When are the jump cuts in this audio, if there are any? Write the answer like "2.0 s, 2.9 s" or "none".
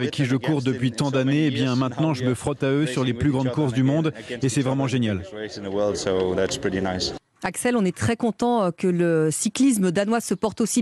none